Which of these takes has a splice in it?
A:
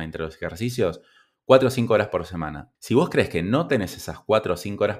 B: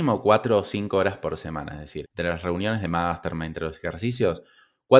B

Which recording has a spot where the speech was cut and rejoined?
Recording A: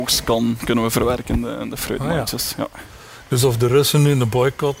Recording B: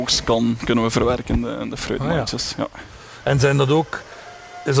B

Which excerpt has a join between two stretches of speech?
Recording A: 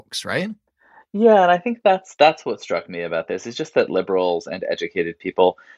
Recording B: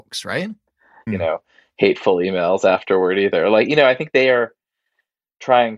B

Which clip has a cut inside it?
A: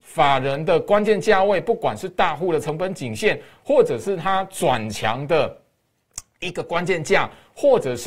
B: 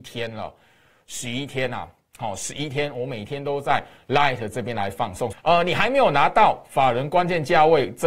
B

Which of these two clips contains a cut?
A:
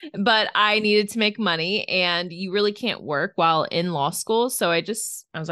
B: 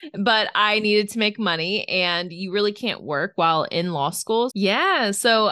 B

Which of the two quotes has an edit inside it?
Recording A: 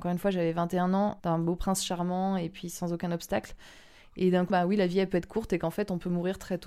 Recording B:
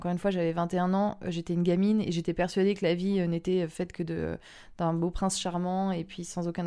A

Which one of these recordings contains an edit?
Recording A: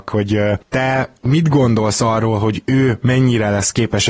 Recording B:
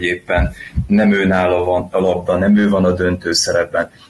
B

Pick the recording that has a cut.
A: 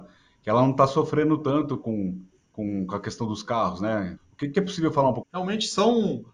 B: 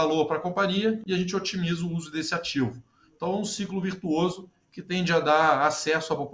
A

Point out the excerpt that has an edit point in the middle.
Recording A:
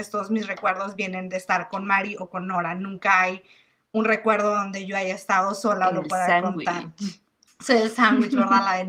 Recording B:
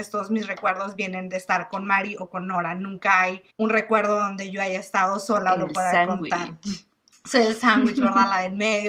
B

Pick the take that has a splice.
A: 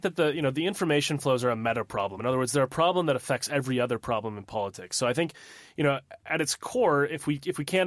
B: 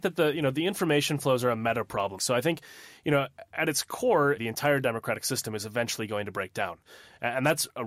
B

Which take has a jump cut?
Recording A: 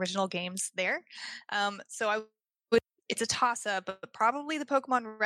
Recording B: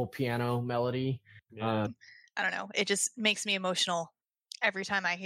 B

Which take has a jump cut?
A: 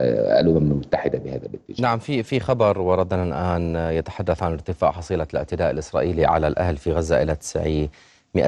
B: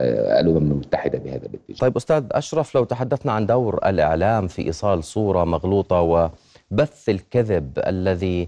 B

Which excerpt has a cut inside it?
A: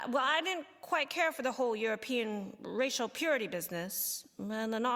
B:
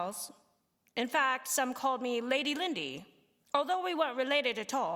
B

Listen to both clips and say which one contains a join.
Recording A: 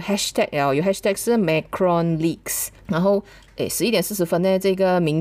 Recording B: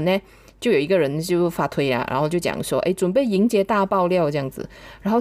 A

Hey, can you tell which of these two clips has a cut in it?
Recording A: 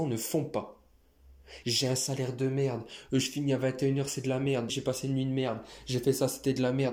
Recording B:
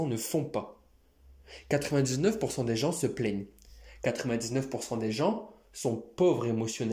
A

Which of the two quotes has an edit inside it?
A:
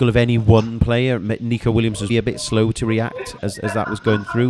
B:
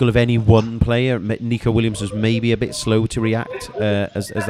A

